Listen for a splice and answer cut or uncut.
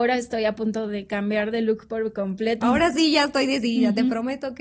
cut